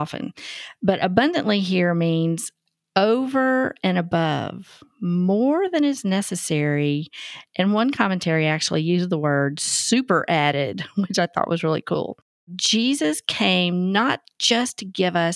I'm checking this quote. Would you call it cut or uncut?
uncut